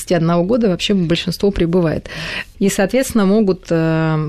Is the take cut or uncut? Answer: cut